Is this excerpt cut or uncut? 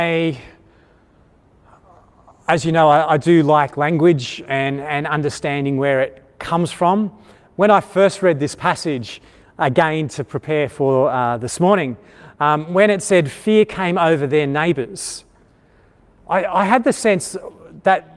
uncut